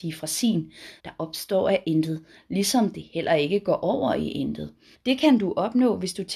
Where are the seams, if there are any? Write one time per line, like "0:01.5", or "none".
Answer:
0:01.0
0:04.9